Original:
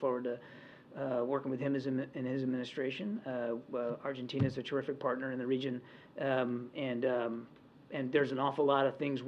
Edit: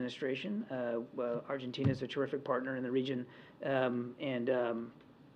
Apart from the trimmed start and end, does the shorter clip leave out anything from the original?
no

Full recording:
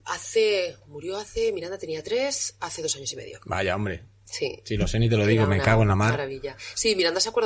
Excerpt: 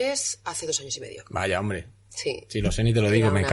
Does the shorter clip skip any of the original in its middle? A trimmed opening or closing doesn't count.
no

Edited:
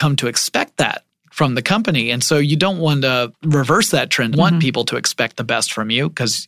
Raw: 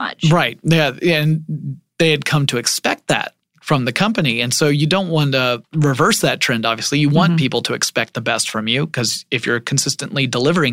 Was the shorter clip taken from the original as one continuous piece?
no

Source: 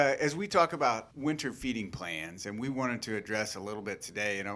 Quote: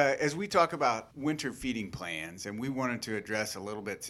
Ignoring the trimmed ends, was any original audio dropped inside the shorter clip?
no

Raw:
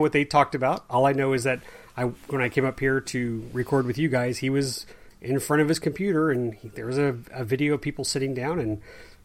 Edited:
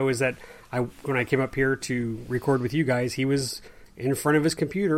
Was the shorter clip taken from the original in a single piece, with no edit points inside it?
yes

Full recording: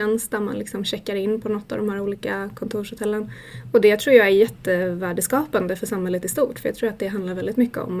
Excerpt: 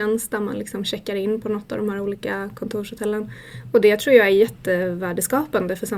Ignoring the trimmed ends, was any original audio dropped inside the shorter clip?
no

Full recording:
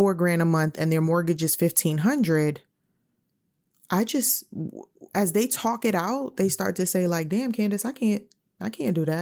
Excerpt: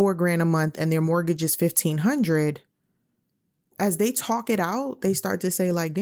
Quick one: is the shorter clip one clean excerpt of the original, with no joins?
no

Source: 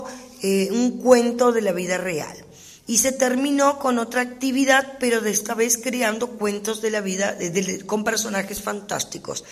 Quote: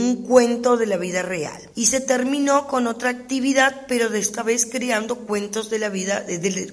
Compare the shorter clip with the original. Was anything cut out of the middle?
yes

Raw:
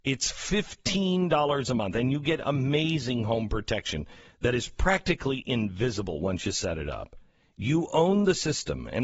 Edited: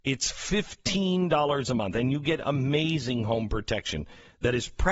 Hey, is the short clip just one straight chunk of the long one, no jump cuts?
yes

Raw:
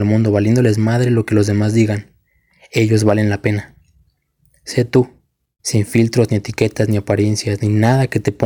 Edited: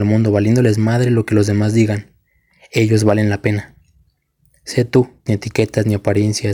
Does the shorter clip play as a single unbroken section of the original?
no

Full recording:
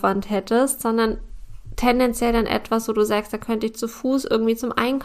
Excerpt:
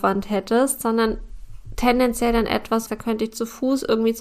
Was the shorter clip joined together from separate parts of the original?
yes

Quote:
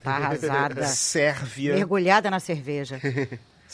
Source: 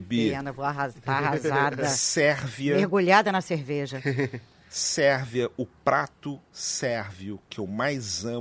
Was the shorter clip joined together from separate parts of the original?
no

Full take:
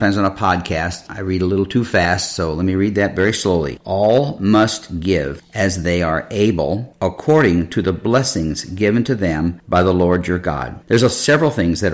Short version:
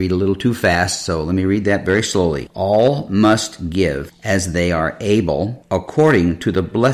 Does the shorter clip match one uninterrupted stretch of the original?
yes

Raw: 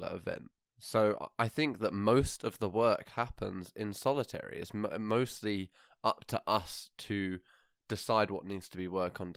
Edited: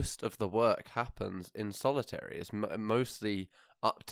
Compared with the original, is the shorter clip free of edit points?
yes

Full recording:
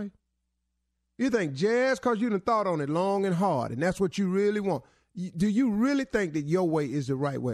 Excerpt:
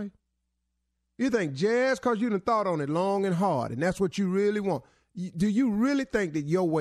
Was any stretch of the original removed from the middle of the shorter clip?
no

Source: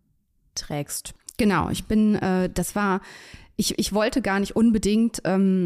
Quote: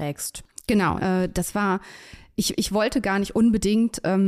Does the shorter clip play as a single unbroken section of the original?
no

